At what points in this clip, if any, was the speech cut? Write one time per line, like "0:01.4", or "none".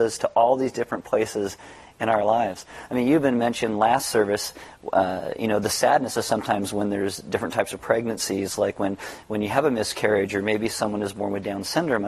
none